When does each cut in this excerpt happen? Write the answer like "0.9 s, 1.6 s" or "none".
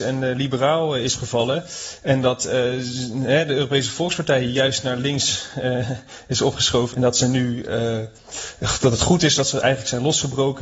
6.9 s